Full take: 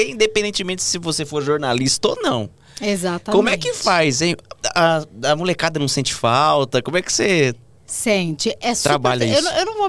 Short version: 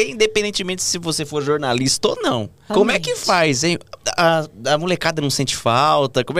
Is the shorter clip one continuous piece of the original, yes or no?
no